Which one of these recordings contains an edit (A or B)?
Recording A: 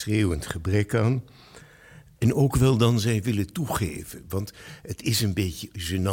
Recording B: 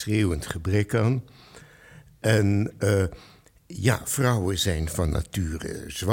A